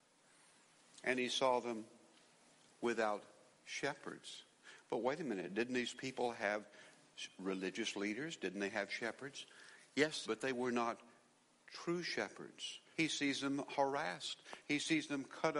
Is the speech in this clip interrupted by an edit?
yes; 2 cuts; at 10.3 s, 12.9 s

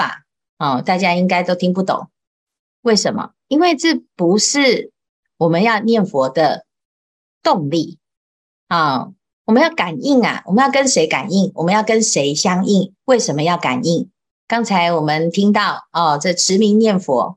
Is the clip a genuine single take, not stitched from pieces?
no; 1 cut; at 14.3 s

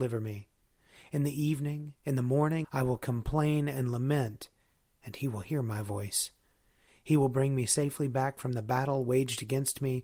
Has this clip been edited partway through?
yes; 1 cut; at 2.6 s

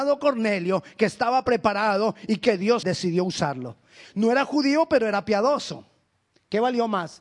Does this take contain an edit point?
yes; 2 cuts; at 2.8 s, 4.0 s

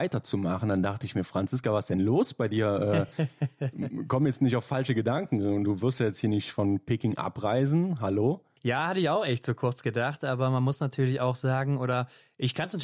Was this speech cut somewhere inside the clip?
no; 0 cuts

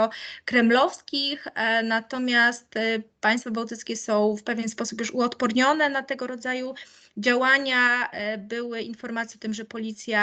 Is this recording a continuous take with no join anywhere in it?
yes; 0 cuts

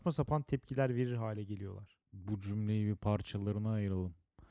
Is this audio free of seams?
no; 1 cut; at 2.0 s

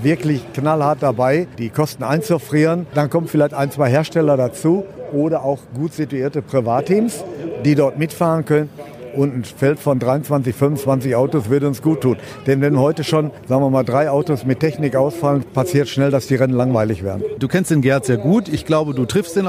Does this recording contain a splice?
no; 0 cuts

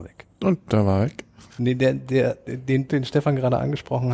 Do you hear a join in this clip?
yes; 2 cuts; at 1.5 s, 2.9 s

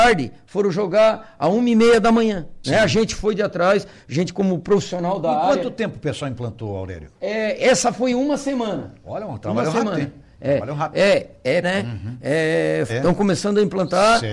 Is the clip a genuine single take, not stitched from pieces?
no; 3 cuts; at 2.6 s, 11.6 s, 12.9 s

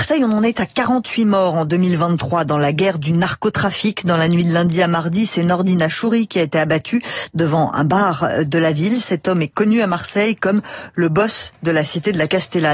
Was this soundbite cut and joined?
no; 0 cuts

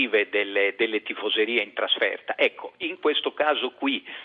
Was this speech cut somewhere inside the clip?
no; 0 cuts

